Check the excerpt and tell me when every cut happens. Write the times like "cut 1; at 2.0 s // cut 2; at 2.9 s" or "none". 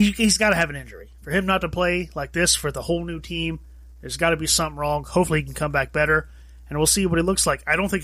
none